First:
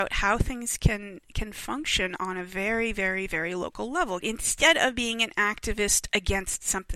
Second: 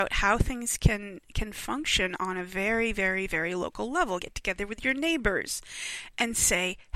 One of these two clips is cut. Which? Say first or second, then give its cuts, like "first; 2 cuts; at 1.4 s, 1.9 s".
first; 1 cut; at 4.2 s